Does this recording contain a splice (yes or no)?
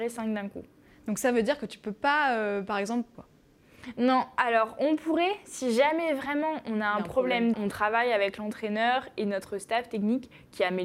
yes